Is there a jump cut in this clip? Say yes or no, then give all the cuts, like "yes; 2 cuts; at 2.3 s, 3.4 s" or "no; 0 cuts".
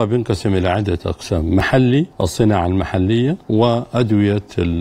yes; 2 cuts; at 2.1 s, 3.4 s